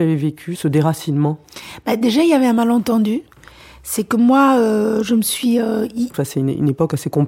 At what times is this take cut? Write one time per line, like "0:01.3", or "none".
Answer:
0:06.1